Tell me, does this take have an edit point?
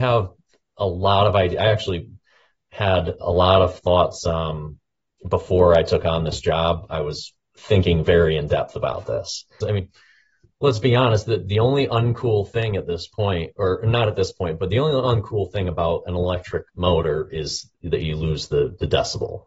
yes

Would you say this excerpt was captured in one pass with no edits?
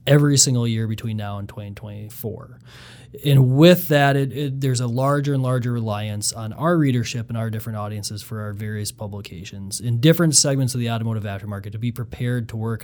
yes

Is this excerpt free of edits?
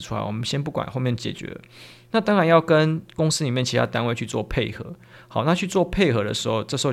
yes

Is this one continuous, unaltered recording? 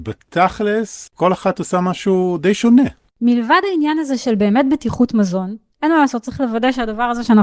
no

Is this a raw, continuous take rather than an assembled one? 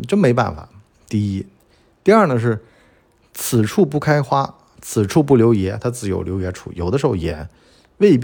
yes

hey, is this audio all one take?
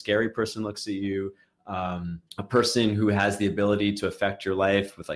no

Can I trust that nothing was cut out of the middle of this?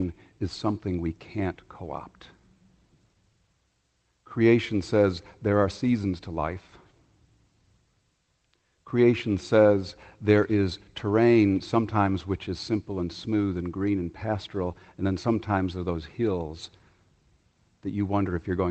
yes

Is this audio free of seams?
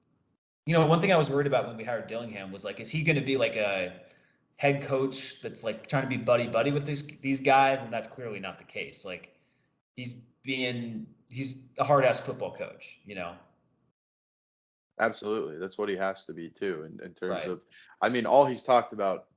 yes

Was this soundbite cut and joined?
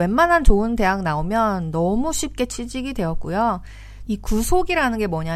yes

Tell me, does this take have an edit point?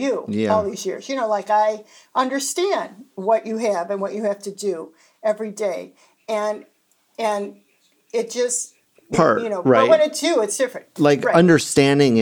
yes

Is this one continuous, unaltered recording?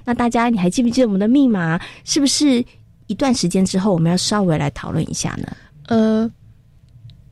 yes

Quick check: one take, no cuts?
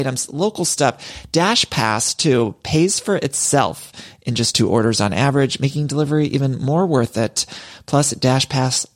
yes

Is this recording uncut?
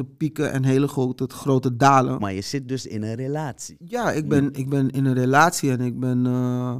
no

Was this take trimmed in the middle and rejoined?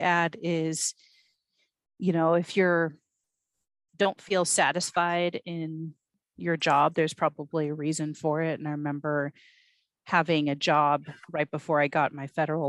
no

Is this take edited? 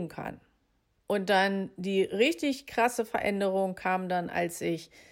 yes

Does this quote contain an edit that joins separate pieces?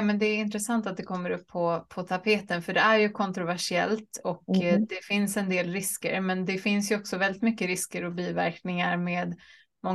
no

